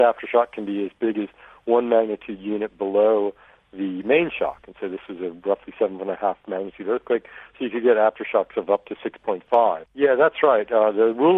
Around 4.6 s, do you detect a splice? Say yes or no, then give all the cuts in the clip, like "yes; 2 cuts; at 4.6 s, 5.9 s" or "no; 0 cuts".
no; 1 cut; at 9.9 s